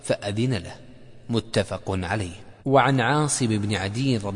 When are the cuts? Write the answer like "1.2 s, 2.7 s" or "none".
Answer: 2.6 s